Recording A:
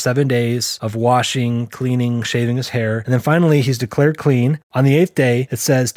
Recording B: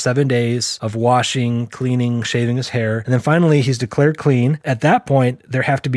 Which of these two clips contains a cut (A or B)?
A